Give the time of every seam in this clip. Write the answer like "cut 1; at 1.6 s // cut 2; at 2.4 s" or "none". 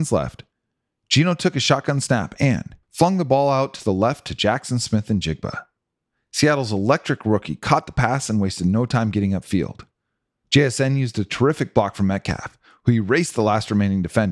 cut 1; at 2.8 s